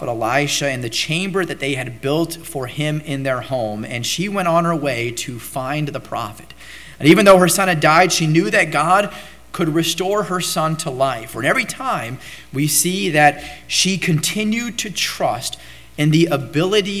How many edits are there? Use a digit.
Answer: 1